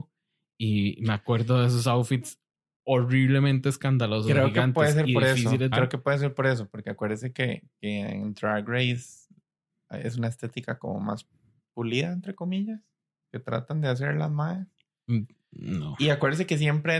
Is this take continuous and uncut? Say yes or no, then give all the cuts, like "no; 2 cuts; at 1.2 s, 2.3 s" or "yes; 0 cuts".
no; 1 cut; at 5.7 s